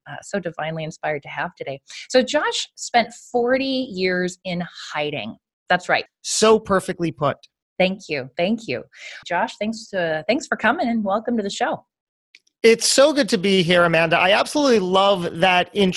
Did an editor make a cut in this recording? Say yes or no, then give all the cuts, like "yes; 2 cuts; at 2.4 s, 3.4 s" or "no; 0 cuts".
yes; 2 cuts; at 6.1 s, 9.2 s